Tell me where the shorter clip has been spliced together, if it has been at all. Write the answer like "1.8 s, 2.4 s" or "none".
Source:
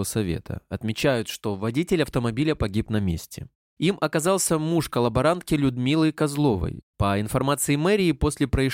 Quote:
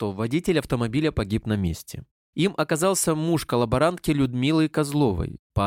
none

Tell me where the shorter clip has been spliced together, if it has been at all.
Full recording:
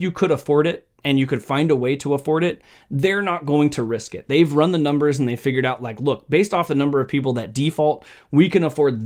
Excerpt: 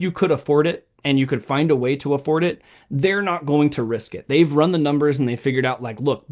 none

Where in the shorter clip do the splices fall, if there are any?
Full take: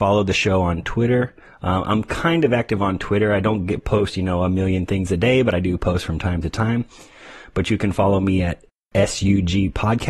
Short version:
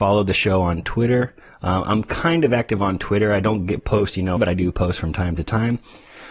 4.4 s

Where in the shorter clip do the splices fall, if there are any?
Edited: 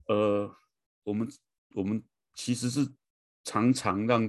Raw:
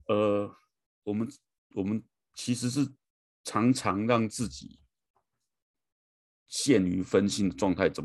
none

